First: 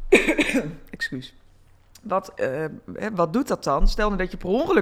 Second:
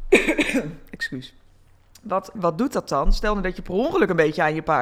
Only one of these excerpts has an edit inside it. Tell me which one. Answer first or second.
second